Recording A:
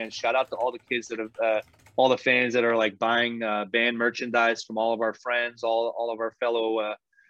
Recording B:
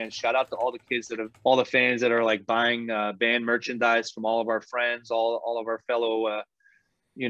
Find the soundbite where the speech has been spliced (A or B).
B